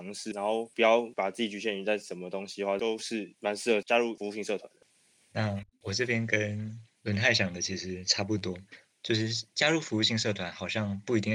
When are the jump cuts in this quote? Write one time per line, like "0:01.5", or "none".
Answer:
none